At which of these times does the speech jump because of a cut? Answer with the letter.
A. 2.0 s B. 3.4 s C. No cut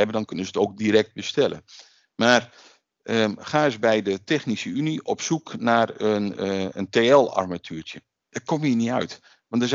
C